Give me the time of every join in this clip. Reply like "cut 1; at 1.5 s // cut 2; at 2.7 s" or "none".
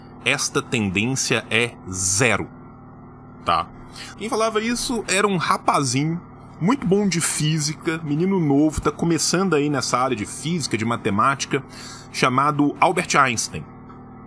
cut 1; at 4.1 s